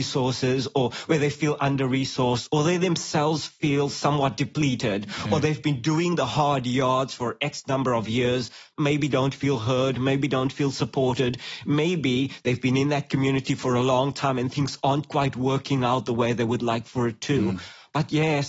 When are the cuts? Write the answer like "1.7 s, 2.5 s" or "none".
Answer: none